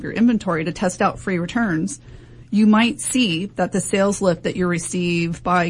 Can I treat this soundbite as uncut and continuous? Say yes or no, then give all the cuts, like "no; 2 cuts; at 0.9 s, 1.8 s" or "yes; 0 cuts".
yes; 0 cuts